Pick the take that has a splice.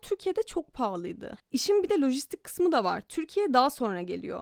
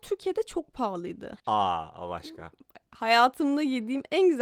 second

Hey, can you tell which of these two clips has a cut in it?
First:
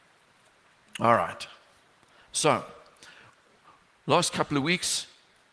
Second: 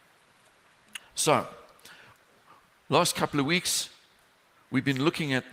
second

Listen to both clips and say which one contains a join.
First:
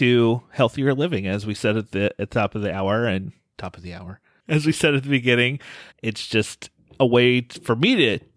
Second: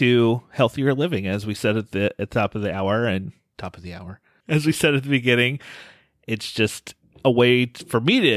first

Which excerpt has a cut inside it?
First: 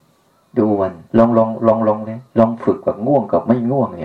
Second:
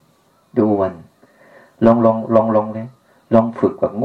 first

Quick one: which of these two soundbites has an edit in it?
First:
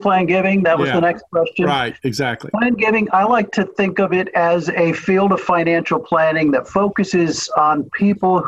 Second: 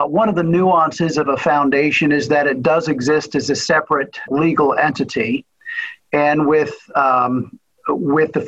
second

